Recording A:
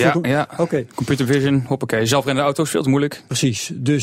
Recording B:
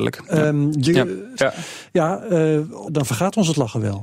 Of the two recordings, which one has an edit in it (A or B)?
B